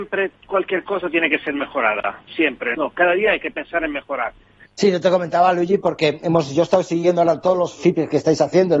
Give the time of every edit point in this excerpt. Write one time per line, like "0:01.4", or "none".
0:02.7
0:04.7

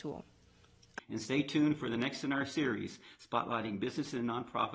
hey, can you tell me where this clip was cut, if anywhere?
0:01.0

